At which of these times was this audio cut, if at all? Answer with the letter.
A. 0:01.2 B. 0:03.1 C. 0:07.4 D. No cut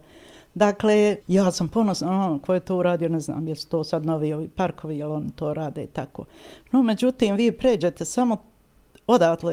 A